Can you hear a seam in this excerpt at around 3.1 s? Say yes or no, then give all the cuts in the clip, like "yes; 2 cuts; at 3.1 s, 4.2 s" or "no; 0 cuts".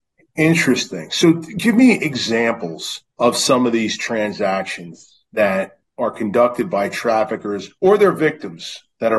yes; 2 cuts; at 3.1 s, 7.8 s